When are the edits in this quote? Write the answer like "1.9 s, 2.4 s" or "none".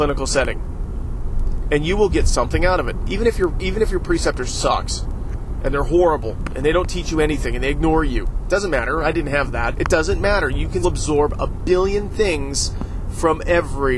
9.7 s, 10.8 s

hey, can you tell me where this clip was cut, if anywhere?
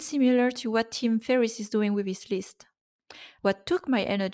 3.4 s

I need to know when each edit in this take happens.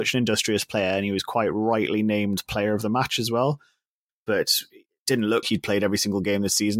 4.1 s, 5.4 s

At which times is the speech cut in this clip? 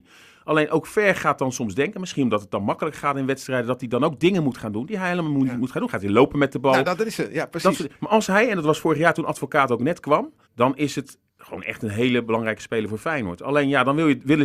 10.5 s

